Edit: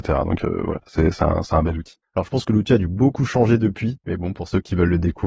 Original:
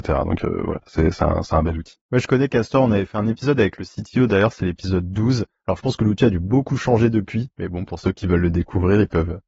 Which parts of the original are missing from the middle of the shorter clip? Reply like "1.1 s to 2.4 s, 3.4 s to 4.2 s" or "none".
2.0 s to 5.5 s

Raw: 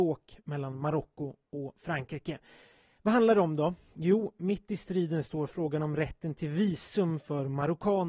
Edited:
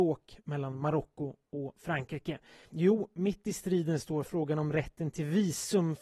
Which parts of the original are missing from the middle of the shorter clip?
2.7 s to 3.9 s

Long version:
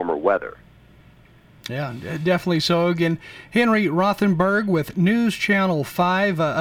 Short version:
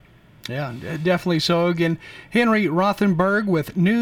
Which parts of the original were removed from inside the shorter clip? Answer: none

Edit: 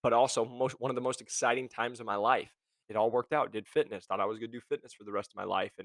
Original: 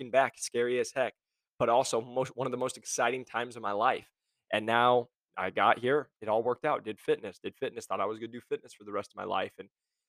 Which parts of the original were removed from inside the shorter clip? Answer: 4.4 s to 6.1 s, 7.4 s to 7.9 s

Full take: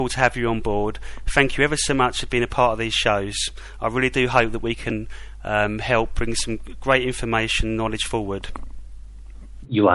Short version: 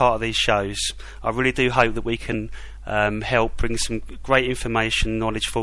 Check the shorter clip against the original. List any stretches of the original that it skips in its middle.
none

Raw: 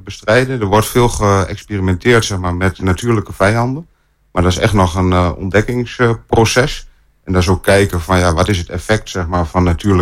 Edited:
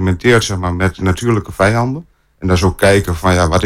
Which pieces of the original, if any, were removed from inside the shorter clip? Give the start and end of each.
4.1 s to 7.2 s

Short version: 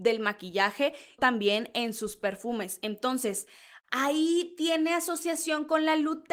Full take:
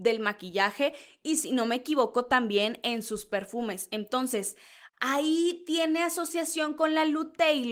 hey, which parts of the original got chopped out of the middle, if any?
1.2 s to 2.3 s

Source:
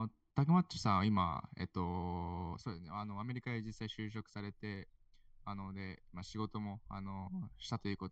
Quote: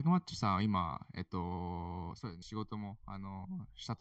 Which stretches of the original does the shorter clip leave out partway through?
2.8 s to 6.2 s

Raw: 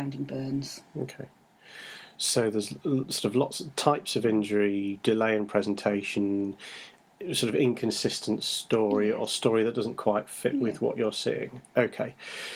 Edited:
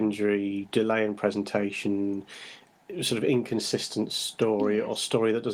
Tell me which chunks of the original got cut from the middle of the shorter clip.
none

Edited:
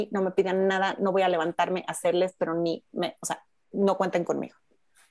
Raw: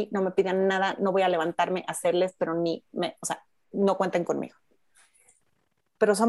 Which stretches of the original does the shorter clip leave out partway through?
none

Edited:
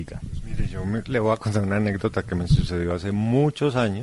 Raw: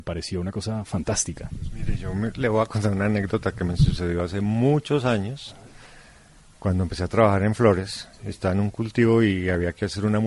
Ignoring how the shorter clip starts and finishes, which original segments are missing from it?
none

